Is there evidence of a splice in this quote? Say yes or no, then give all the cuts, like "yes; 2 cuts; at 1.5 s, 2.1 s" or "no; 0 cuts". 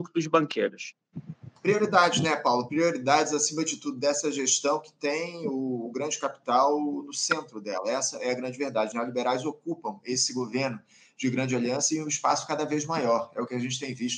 no; 0 cuts